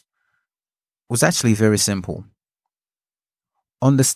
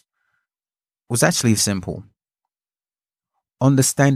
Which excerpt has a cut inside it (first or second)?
second